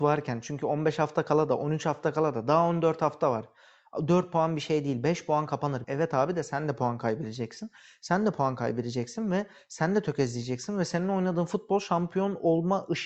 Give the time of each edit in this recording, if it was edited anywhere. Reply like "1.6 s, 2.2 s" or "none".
5.8 s